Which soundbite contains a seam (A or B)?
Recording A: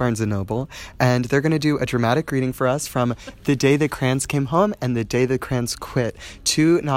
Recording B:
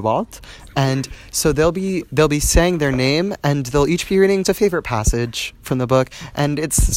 B